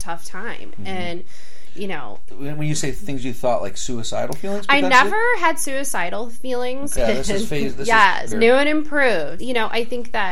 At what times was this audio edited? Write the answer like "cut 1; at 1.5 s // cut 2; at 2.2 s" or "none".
cut 1; at 7.0 s // cut 2; at 8.3 s // cut 3; at 9.4 s